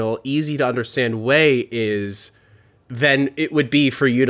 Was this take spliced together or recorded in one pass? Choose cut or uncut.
uncut